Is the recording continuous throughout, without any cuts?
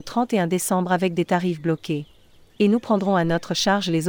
no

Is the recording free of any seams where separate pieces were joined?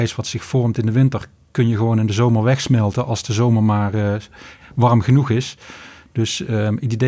yes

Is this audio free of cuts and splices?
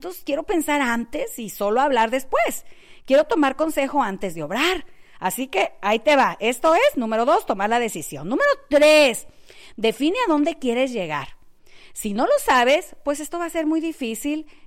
yes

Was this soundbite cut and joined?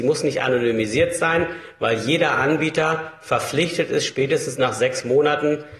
no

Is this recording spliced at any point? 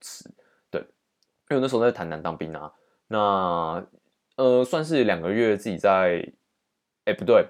no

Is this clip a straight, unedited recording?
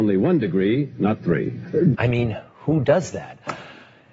no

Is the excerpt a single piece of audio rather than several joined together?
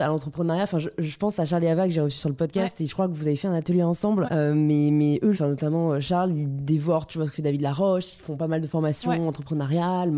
no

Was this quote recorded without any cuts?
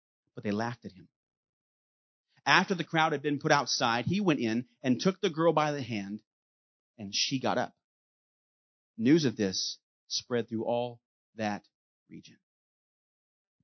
yes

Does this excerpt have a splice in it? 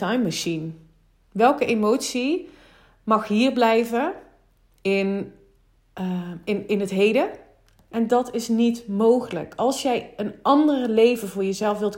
yes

